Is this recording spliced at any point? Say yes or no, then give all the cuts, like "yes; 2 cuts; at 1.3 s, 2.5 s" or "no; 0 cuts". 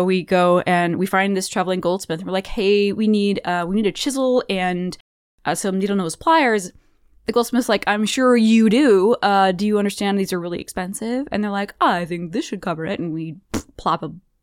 no; 0 cuts